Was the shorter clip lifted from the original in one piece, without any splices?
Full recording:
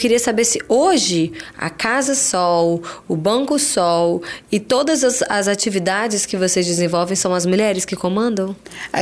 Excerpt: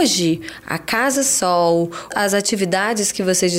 no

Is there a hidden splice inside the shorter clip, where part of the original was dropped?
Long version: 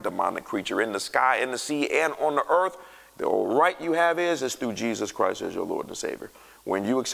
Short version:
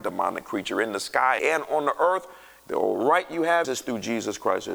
yes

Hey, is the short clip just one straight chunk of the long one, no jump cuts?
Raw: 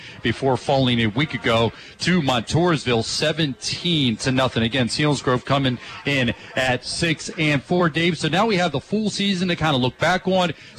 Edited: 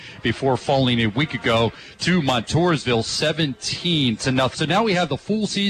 no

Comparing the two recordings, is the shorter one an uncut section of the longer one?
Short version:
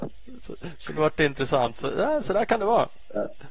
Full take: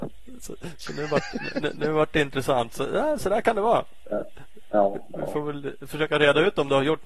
no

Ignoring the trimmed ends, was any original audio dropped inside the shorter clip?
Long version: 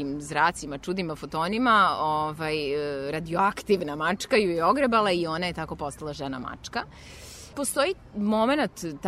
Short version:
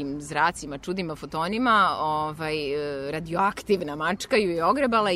no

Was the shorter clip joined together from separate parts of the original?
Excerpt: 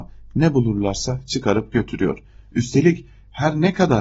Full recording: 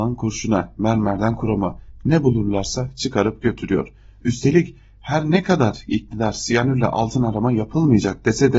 no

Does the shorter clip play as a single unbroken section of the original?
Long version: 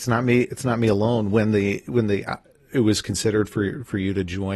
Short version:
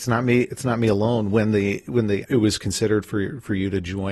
no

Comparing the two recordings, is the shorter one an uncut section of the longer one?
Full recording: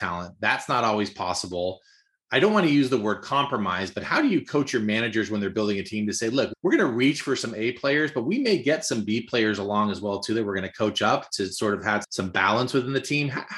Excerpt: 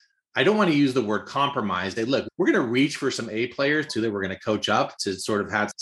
no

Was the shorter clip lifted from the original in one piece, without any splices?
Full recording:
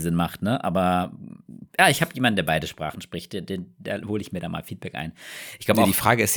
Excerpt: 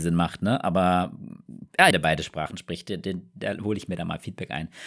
no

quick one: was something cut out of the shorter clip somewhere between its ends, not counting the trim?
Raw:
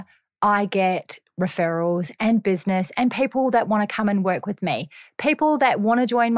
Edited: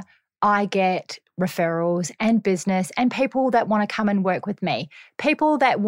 no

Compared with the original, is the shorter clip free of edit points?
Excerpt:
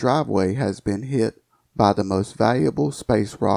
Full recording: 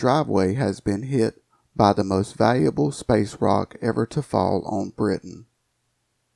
yes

